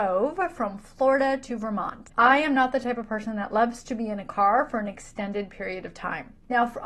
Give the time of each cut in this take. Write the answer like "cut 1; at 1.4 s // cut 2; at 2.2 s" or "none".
cut 1; at 2.1 s